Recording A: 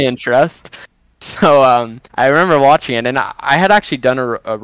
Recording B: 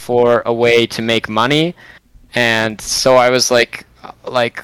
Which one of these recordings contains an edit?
A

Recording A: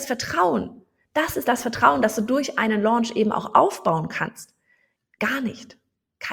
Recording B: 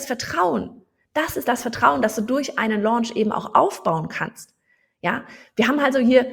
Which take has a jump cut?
A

